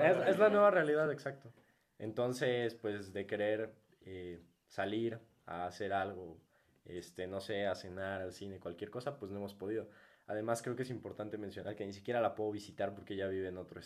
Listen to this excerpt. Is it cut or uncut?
uncut